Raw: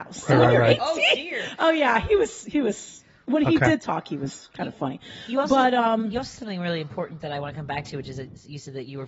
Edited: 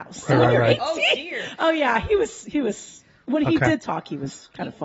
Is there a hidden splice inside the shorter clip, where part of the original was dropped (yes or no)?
no